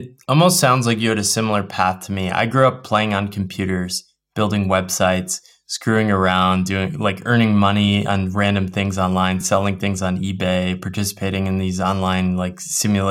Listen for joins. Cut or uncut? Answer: uncut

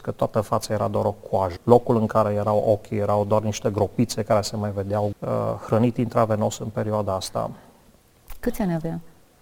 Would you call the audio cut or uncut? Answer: cut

